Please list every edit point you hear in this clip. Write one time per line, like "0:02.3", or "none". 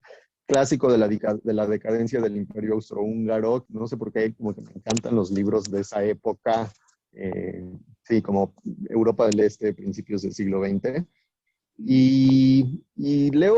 0:03.7
0:11.6